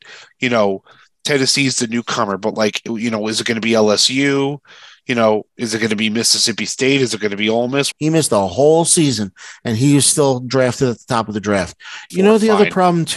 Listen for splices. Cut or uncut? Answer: cut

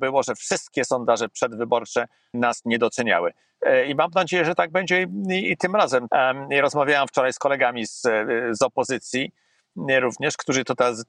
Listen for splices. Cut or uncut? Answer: cut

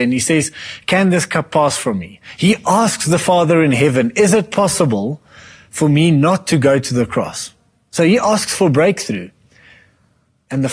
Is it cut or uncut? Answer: uncut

